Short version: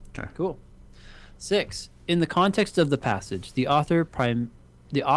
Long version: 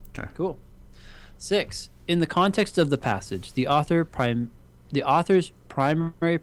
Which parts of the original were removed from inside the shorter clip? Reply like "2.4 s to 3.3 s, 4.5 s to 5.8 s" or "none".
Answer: none